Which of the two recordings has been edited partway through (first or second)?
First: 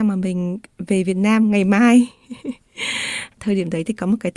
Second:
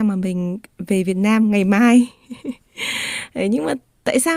first